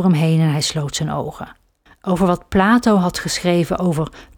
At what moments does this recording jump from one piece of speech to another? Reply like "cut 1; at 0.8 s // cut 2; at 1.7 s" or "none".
cut 1; at 1.9 s